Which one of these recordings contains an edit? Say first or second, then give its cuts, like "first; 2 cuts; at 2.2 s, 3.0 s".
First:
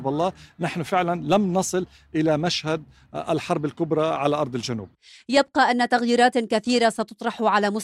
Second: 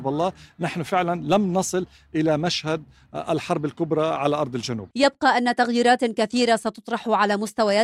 second; 1 cut; at 4.9 s